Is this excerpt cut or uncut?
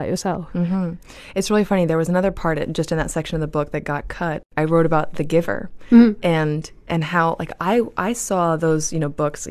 uncut